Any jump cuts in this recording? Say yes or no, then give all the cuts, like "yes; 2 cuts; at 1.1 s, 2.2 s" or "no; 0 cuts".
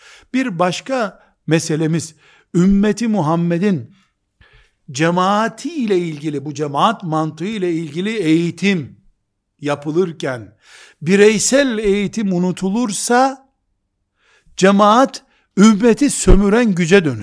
no; 0 cuts